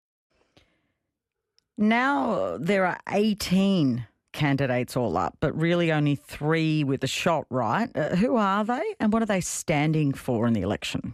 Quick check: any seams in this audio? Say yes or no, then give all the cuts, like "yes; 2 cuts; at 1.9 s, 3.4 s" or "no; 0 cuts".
no; 0 cuts